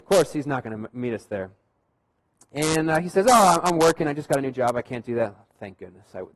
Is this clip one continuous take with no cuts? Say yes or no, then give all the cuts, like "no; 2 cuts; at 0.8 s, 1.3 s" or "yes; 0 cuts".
yes; 0 cuts